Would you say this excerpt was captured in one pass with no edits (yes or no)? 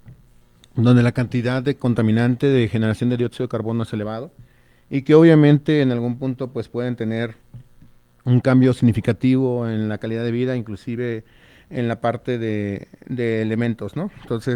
yes